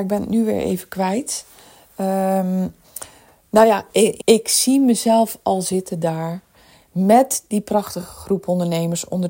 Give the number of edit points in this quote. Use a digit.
1